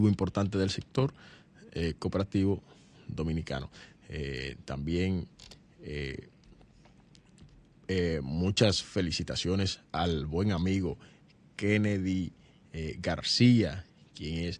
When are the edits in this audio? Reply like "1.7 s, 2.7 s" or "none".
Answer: 3.9 s